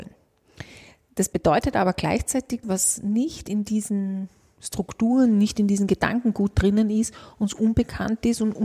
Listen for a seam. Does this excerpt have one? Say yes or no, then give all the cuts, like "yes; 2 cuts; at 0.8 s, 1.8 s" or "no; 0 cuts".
yes; 1 cut; at 2.6 s